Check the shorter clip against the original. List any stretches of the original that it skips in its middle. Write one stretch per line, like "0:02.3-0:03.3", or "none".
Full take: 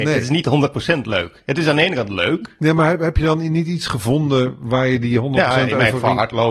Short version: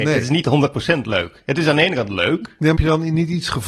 0:02.8-0:03.1